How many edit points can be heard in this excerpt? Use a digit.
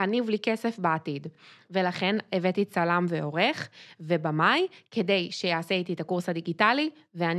0